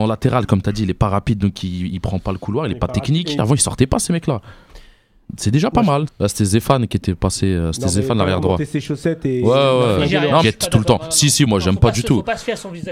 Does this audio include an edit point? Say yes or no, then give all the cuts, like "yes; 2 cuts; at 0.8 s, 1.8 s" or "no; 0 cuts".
yes; 3 cuts; at 3.4 s, 6.1 s, 10.4 s